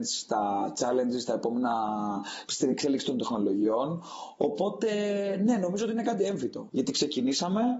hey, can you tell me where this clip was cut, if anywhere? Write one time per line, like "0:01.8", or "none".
0:02.5
0:06.7